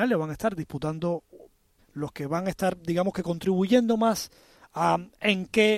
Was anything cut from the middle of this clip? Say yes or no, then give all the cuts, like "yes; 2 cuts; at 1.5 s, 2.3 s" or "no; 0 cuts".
yes; 1 cut; at 1.8 s